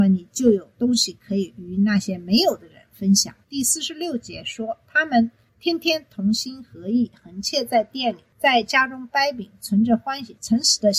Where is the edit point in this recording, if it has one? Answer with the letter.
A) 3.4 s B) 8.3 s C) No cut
A